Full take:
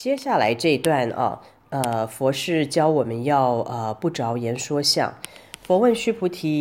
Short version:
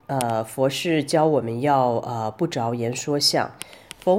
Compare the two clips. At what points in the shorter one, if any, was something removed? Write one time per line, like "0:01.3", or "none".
none